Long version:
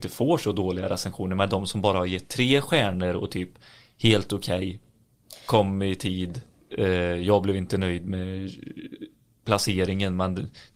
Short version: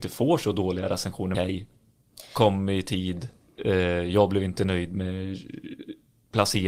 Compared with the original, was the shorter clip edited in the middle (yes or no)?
yes